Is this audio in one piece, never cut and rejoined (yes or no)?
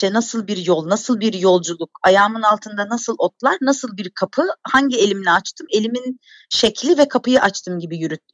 yes